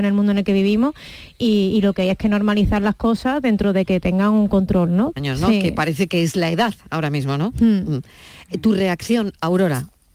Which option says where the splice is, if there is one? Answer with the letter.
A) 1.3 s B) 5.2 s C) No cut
B